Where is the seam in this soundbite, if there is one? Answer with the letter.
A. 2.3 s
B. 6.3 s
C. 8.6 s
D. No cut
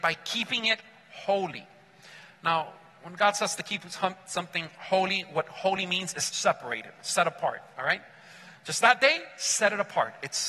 B